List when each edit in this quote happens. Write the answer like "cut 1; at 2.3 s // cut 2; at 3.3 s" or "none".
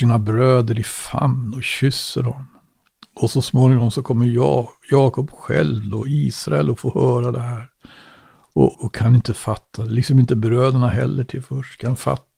cut 1; at 8.7 s